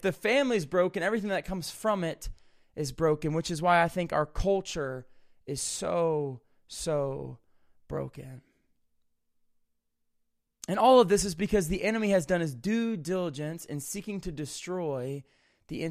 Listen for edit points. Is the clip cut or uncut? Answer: uncut